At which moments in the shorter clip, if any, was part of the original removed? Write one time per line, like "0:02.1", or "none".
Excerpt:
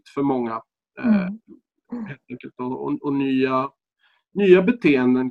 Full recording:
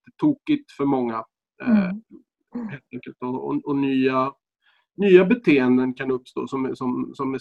none

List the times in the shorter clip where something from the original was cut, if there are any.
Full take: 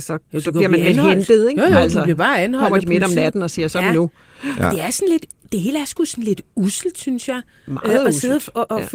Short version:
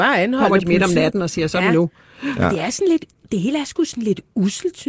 none

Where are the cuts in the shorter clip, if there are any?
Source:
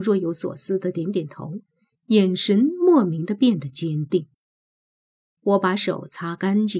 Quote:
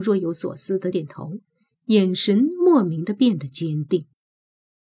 0:00.9

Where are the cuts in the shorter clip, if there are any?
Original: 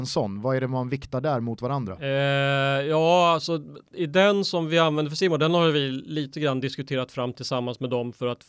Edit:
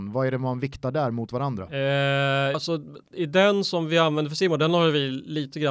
0:02.5

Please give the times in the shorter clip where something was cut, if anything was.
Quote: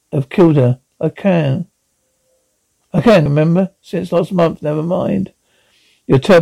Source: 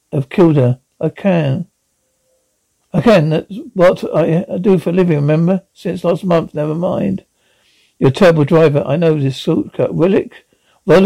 0:03.3

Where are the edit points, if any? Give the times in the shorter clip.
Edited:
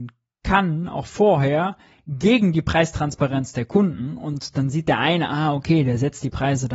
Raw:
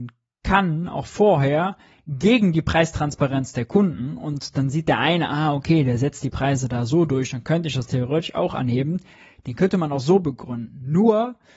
none

